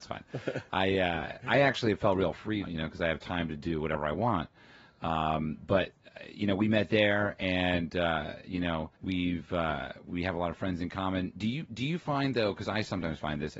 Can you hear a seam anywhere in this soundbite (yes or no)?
yes